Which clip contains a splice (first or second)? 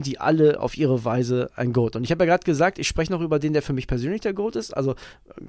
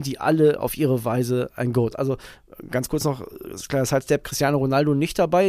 second